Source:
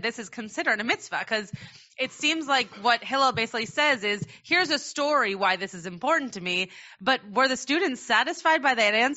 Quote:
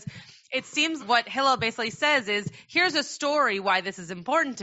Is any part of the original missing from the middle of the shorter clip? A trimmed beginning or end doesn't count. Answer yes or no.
yes